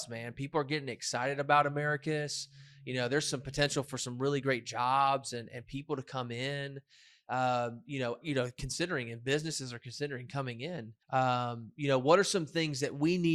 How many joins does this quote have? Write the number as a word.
two